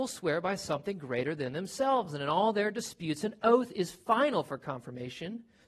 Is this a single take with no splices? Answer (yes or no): yes